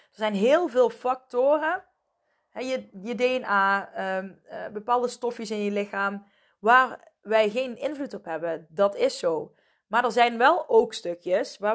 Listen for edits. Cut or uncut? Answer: uncut